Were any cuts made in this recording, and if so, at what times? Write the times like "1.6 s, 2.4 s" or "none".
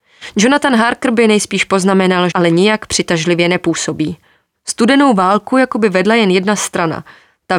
2.3 s, 4.5 s